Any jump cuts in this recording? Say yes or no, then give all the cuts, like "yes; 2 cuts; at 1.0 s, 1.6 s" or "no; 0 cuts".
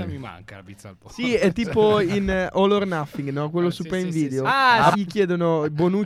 yes; 1 cut; at 4.9 s